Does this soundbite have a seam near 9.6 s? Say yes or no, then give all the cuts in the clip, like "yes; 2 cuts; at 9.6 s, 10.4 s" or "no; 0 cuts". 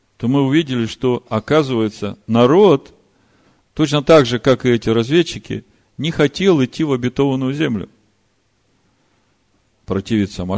yes; 1 cut; at 9.6 s